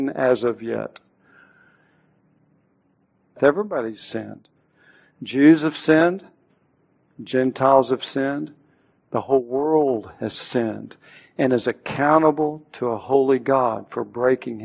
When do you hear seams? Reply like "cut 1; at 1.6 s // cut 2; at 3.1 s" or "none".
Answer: cut 1; at 3.4 s

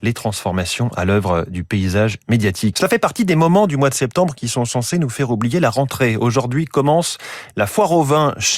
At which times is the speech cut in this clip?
cut 1; at 2.7 s

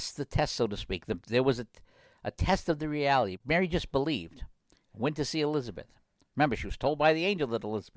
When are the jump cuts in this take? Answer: none

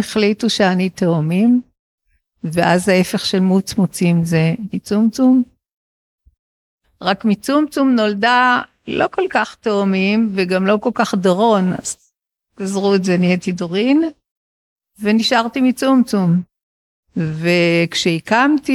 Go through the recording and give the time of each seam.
cut 1; at 6.8 s

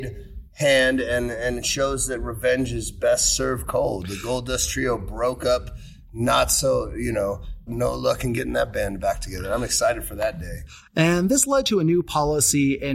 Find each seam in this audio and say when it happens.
cut 1; at 7.7 s

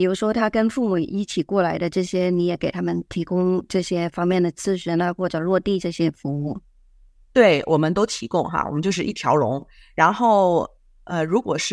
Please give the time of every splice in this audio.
none

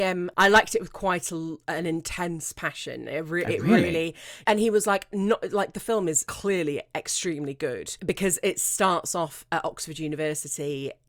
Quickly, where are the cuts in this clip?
cut 1; at 4.4 s

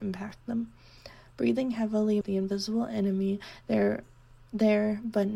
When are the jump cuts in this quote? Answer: cut 1; at 2.2 s

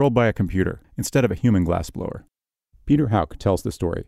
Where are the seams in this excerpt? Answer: cut 1; at 2.7 s

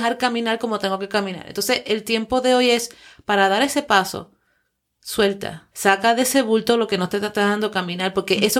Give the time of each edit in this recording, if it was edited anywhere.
cut 1; at 5.7 s

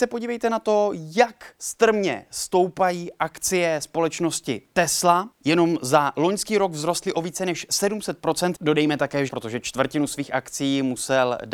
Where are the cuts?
cut 1; at 1.5 s // cut 2; at 9.3 s

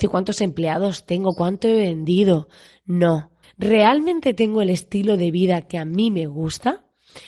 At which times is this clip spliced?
cut 1; at 3.4 s

